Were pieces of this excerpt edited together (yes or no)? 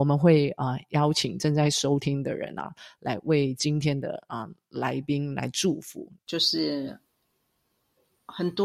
yes